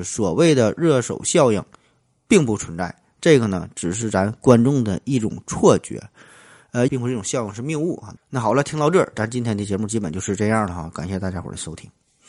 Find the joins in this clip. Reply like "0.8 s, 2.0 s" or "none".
6.9 s, 8.2 s